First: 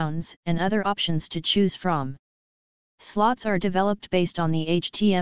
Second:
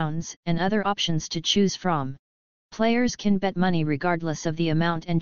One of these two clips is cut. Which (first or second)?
second